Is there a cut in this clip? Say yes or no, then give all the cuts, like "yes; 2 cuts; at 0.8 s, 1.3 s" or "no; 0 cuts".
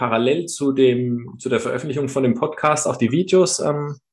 no; 0 cuts